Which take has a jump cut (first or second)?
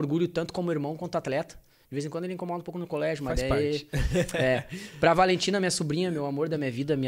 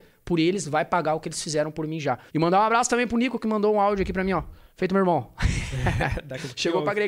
second